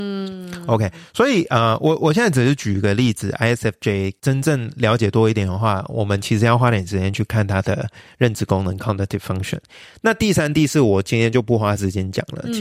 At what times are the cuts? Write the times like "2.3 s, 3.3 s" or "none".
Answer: none